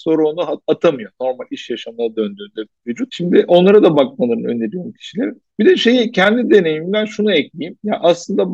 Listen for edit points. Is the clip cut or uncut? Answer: cut